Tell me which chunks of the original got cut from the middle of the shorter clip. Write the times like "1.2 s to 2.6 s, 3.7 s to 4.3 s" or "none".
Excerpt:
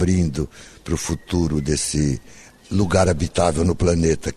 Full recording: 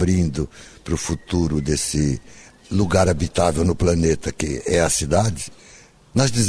none